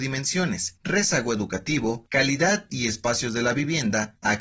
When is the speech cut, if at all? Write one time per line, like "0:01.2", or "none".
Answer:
0:02.1